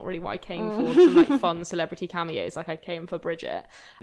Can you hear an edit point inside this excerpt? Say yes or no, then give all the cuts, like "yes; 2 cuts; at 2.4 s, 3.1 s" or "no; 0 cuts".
no; 0 cuts